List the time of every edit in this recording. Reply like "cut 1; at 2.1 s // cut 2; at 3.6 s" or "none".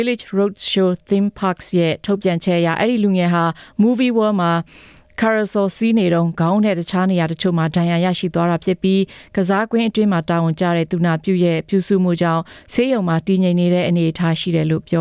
none